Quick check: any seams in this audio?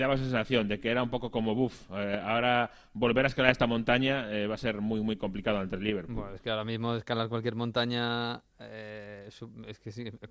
no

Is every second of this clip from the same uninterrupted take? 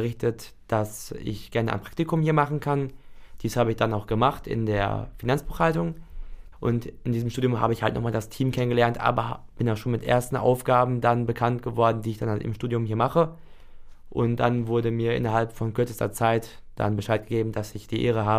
no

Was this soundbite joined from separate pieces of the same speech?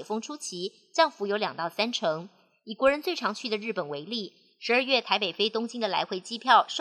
no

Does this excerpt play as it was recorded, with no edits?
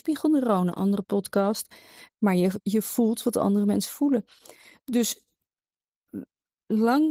yes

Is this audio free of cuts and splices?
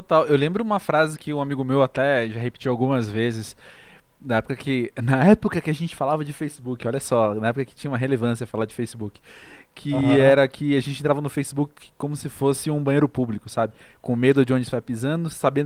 yes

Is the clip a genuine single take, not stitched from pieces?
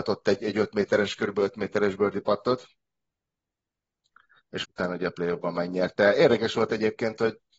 no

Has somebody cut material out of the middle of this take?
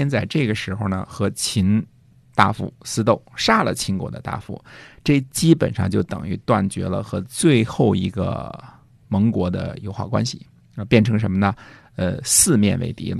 no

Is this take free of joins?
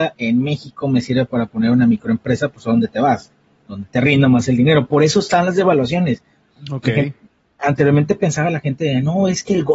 yes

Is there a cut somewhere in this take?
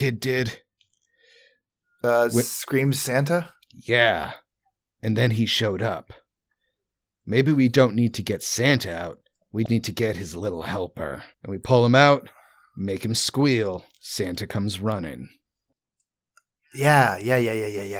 yes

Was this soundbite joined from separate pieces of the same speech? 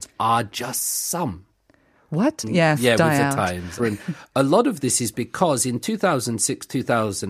yes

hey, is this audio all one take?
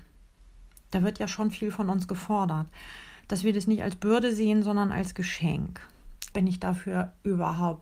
no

